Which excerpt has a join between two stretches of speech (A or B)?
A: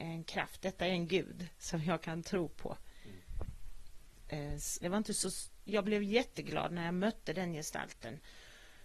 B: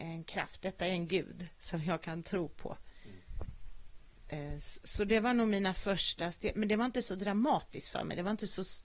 A